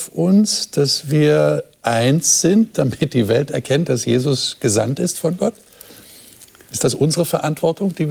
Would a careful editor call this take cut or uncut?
uncut